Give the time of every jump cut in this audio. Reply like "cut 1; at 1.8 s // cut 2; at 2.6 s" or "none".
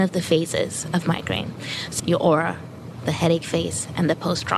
cut 1; at 2.0 s